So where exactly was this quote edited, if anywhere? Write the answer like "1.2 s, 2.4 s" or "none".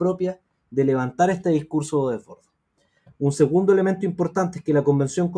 none